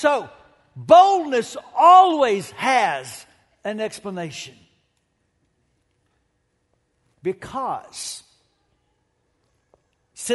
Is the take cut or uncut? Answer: uncut